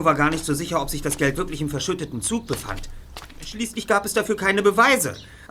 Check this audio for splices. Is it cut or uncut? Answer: uncut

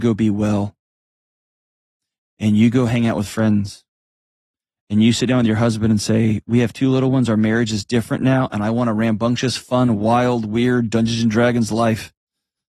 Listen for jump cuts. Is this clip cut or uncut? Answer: uncut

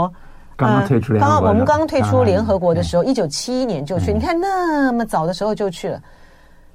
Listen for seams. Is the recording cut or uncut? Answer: uncut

